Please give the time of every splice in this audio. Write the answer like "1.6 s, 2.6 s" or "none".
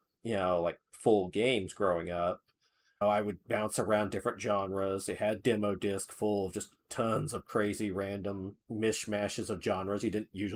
3.0 s, 8.6 s